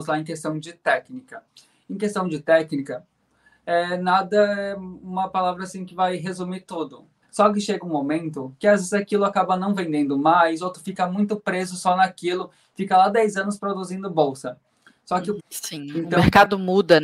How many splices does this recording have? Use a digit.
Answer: 2